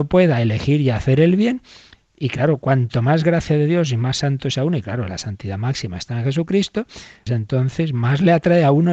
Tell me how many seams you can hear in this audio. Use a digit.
1